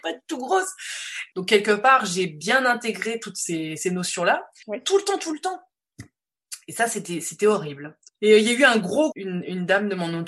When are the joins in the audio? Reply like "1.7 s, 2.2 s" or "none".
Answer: 1.3 s, 4.6 s, 9.1 s